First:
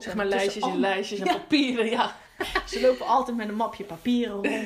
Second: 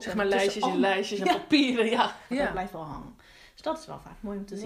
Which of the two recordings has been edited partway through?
second; 1 cut; at 2.3 s

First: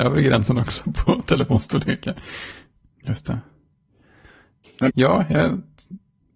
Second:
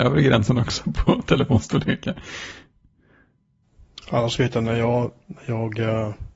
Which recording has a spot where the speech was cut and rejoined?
first; 2 cuts; at 2.9 s, 4.9 s

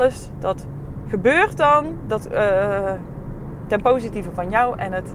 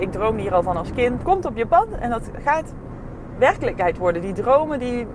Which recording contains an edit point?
second; 1 cut; at 1.2 s

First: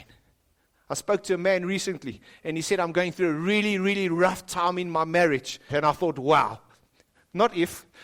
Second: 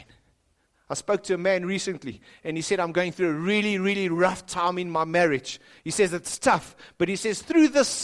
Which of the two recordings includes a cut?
first; 1 cut; at 5.7 s

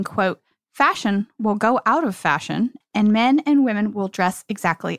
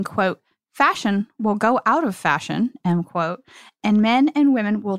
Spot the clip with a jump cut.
first; 1 cut; at 2.8 s

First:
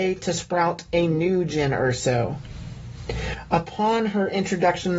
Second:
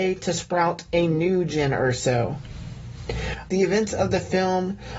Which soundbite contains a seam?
second; 1 cut; at 3.5 s

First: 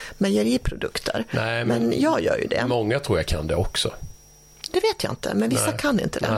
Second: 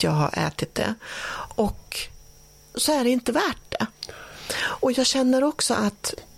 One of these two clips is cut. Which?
second; 1 cut; at 2.7 s

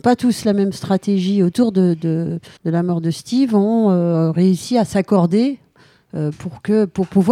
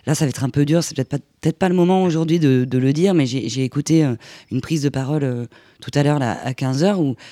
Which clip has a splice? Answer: first; 1 cut; at 2.6 s

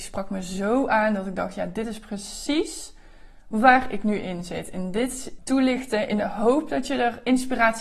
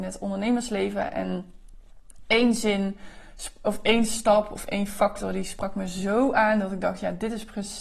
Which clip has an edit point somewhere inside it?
first; 1 cut; at 5.4 s

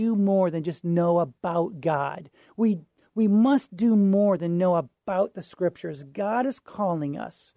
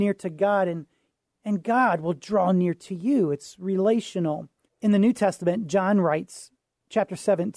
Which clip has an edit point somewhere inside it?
second; 1 cut; at 4.7 s

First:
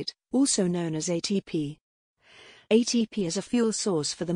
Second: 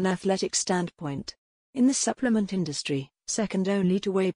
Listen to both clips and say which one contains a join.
second; 1 cut; at 3.2 s

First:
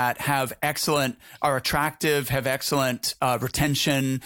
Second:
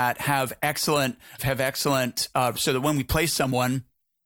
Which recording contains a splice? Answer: second; 2 cuts; at 1.4 s, 2.5 s

